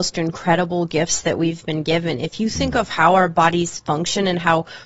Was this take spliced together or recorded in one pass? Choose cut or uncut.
uncut